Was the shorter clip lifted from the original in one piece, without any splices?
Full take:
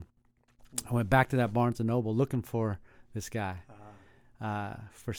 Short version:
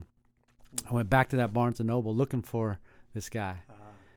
yes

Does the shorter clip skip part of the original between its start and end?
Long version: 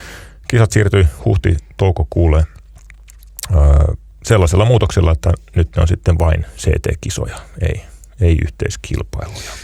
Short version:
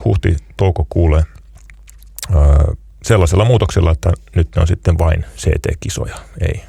no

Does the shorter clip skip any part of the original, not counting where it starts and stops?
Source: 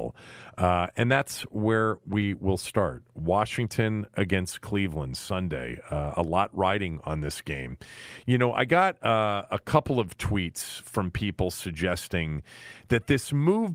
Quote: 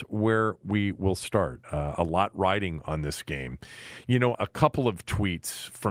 yes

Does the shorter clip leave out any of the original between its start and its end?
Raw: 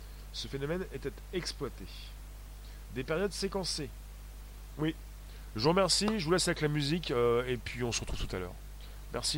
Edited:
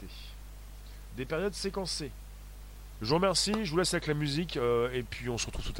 yes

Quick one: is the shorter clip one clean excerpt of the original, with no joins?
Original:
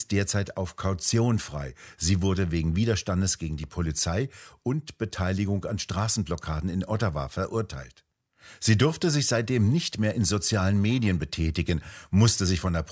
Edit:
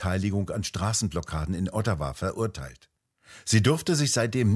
yes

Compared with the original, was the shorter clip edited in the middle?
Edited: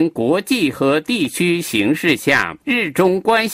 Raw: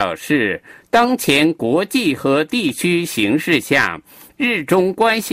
yes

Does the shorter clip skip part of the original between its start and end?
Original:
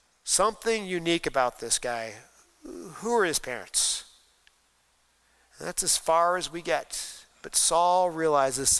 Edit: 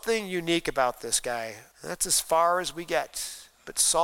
yes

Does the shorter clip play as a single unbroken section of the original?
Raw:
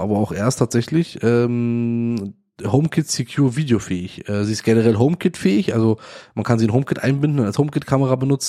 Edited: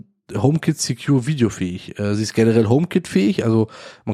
yes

